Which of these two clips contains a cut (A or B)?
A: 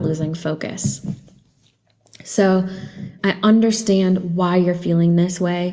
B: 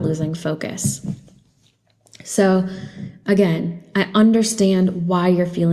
A